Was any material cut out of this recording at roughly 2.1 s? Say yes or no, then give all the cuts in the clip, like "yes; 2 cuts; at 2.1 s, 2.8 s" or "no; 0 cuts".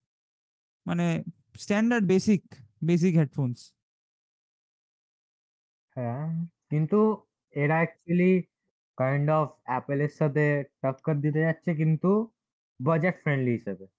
no; 0 cuts